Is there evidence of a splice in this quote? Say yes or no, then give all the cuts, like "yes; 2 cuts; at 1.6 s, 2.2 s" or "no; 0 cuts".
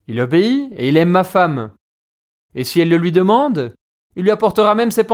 no; 0 cuts